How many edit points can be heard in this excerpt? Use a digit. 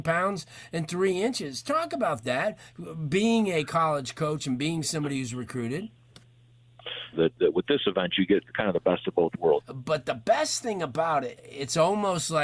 3